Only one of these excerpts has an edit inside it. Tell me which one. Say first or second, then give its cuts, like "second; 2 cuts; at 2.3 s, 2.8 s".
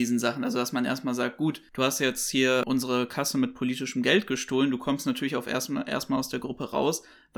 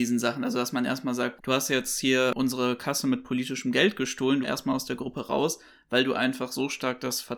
second; 2 cuts; at 1.4 s, 4.4 s